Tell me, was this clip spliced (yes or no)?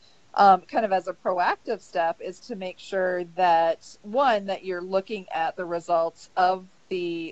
yes